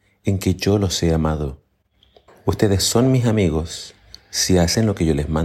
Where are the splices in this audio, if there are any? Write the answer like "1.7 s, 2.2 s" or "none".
2.3 s